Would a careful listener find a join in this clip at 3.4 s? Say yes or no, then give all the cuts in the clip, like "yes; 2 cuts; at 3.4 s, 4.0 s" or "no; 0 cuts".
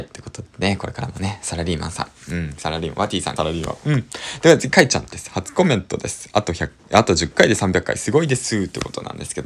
yes; 1 cut; at 3.4 s